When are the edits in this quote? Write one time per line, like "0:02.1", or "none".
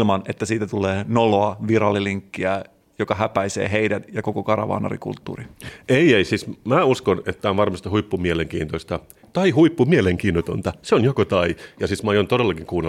none

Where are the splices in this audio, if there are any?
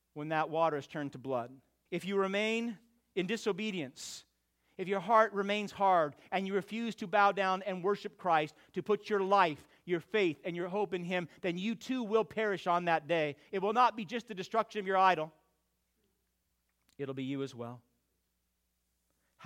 0:01.9

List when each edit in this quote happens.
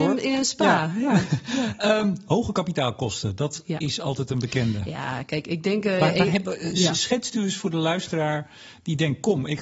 none

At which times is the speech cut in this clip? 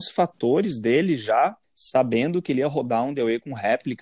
0:01.6

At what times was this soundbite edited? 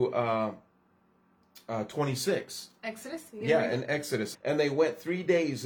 0:04.3

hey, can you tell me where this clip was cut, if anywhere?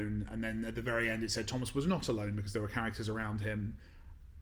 none

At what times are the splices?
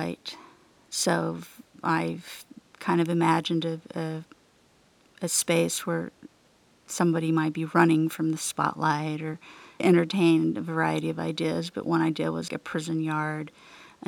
0:12.5

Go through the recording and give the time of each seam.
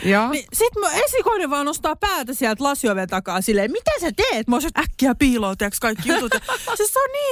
0:04.7

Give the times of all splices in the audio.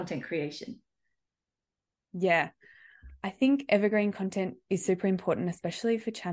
none

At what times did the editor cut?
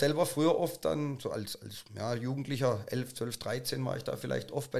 none

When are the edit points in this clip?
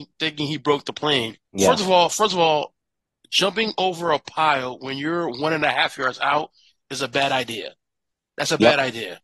0:01.4

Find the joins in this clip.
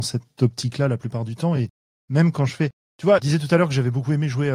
none

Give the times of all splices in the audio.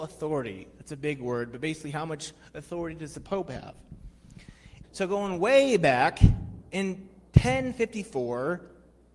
0:04.8

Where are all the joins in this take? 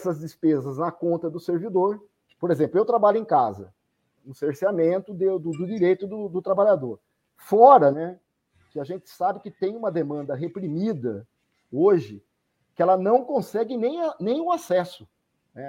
0:04.2

